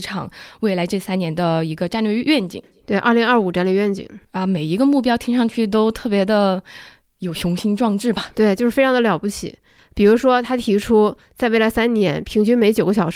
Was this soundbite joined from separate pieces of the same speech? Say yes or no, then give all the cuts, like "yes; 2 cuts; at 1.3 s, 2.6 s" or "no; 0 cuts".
no; 0 cuts